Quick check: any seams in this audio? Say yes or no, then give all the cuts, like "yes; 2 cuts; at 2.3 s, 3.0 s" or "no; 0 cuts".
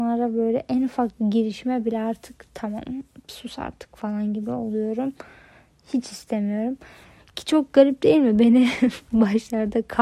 no; 0 cuts